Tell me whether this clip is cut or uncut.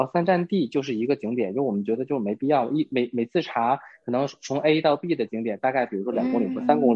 uncut